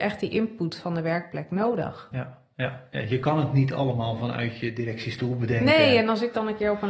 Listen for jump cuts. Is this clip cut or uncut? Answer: uncut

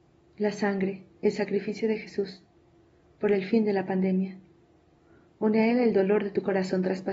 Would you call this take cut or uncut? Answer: uncut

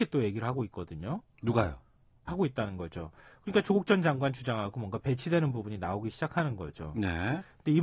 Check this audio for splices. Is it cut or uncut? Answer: cut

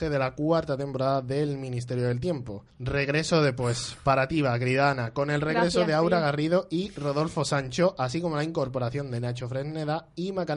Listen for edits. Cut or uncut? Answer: cut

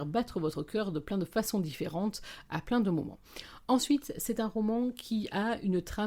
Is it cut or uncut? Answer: uncut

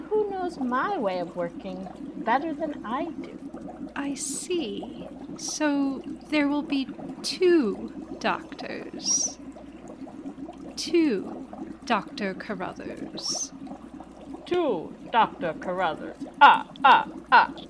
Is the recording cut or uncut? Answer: uncut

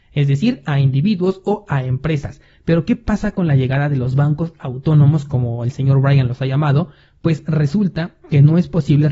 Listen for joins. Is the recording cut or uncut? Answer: uncut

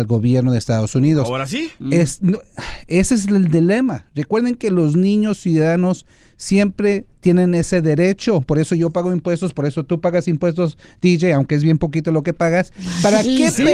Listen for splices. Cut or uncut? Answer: uncut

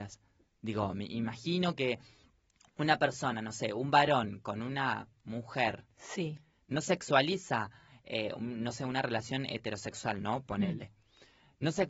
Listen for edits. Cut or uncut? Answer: uncut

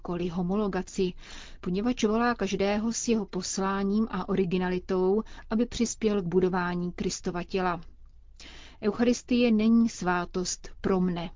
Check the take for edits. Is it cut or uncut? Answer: uncut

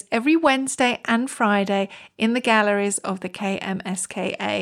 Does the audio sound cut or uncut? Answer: uncut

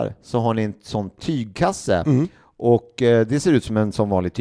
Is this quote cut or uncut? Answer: uncut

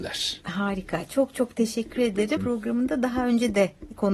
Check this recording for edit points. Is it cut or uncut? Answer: cut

